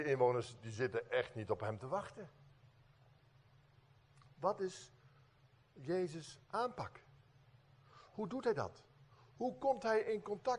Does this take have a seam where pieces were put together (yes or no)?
no